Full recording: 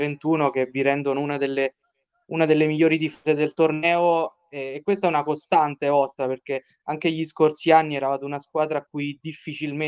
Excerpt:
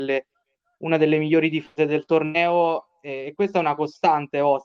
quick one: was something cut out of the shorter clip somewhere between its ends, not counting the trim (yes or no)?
no